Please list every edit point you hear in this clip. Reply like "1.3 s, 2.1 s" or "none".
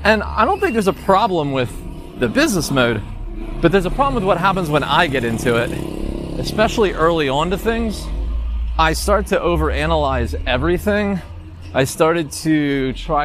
none